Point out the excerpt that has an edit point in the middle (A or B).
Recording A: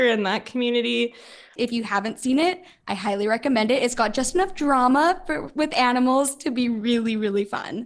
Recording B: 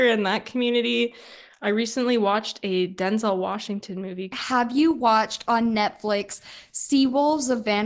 A